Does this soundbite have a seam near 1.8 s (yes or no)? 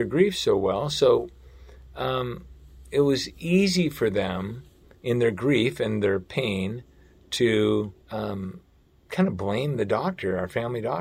no